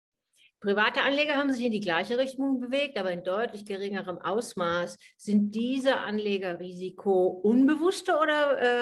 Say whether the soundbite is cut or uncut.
uncut